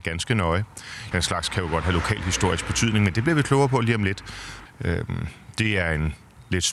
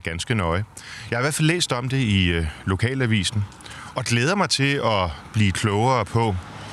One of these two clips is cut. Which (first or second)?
first